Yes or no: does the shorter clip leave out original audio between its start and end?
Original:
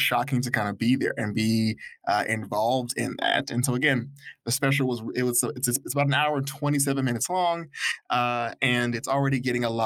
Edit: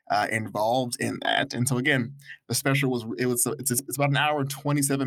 no